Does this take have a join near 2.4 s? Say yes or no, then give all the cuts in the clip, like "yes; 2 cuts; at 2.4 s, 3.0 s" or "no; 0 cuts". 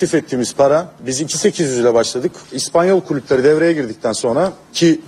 yes; 1 cut; at 2.4 s